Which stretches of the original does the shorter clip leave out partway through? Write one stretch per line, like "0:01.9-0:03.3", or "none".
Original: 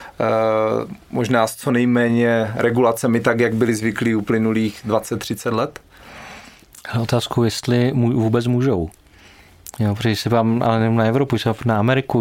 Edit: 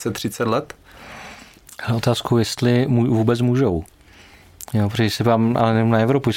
none